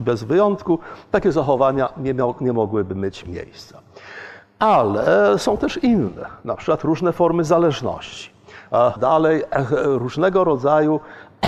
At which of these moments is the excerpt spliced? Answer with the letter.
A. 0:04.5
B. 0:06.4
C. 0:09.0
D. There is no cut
C